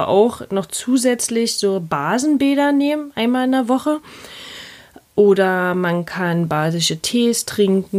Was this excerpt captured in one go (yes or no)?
yes